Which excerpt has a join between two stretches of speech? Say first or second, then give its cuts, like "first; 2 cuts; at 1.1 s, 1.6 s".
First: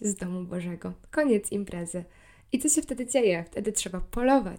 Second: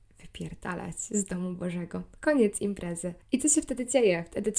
second; 1 cut; at 3.2 s